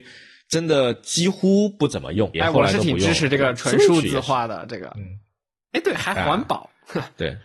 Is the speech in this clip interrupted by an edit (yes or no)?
yes